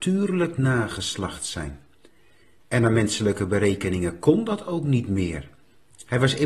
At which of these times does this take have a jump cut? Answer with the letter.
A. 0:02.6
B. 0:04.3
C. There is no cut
A